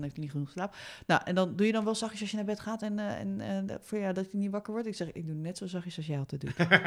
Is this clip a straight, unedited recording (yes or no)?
yes